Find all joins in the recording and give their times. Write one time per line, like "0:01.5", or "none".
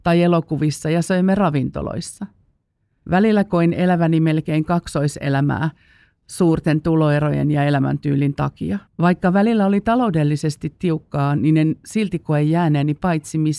0:08.9